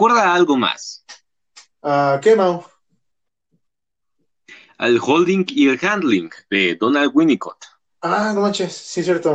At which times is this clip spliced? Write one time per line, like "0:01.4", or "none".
none